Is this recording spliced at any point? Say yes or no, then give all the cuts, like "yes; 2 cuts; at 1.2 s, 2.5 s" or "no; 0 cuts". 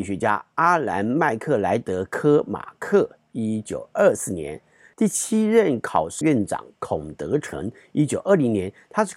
yes; 2 cuts; at 4.9 s, 6.2 s